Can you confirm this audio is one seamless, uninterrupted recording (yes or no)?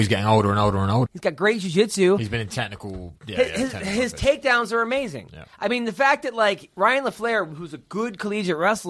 no